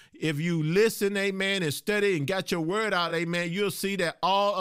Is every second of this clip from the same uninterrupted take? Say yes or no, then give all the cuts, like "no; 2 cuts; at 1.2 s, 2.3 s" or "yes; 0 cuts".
yes; 0 cuts